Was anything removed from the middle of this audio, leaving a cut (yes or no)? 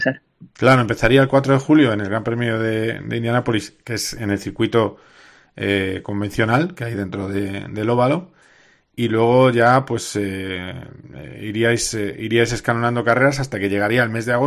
no